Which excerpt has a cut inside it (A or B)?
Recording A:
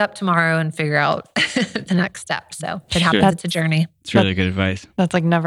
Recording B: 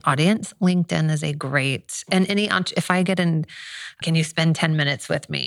B